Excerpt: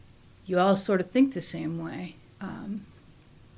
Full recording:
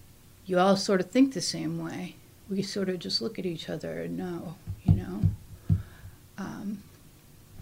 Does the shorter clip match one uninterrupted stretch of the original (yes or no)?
no